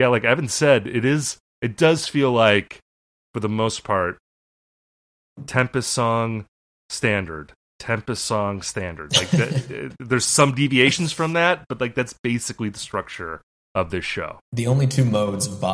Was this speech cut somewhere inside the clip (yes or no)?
no